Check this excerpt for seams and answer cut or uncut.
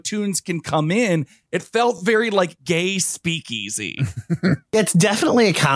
uncut